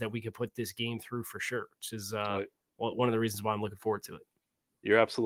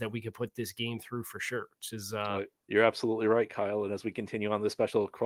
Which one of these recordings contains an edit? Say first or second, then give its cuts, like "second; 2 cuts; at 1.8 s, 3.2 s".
second; 1 cut; at 2.6 s